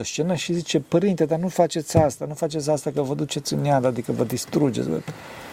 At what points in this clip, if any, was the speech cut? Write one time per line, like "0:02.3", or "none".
none